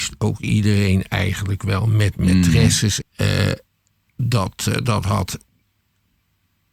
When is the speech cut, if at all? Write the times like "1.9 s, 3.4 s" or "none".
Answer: 3.0 s